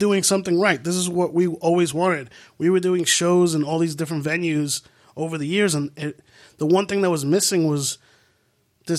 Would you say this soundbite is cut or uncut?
uncut